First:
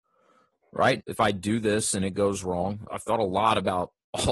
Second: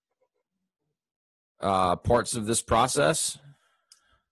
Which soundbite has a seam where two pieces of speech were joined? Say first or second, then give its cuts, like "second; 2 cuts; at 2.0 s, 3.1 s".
first; 2 cuts; at 1.0 s, 2.9 s